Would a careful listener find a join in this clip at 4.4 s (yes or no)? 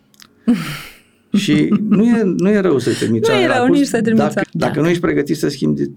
yes